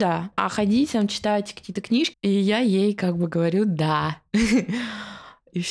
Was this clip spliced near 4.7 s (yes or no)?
no